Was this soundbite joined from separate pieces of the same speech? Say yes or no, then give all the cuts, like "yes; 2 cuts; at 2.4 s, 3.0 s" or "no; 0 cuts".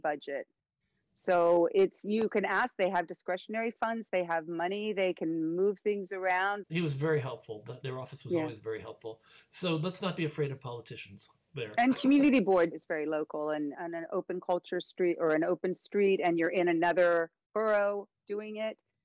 yes; 3 cuts; at 6.6 s, 12.7 s, 13.7 s